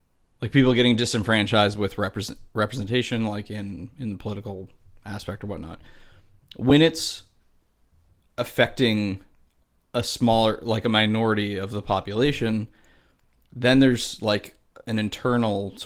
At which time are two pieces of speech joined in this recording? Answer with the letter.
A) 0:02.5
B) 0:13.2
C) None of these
C